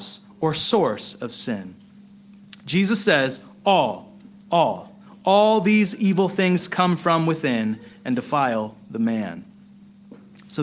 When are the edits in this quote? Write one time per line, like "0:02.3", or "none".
none